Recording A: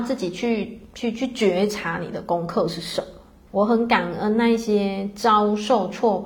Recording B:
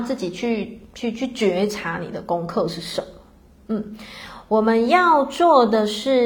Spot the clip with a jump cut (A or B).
A